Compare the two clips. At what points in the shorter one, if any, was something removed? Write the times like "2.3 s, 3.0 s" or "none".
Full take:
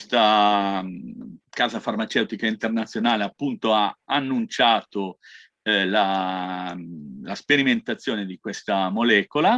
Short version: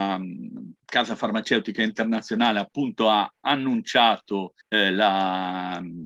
4.6 s